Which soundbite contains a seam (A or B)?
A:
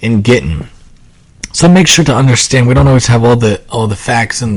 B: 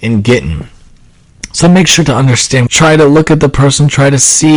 B